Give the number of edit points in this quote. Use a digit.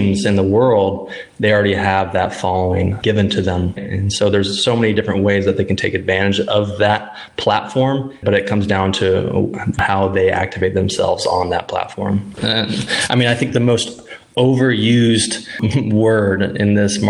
3